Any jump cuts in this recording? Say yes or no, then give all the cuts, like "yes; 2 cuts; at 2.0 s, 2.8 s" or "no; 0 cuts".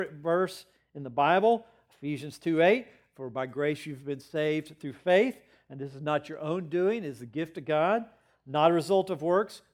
no; 0 cuts